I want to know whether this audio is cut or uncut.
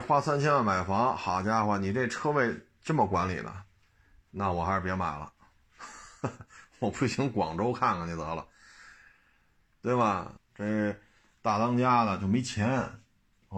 cut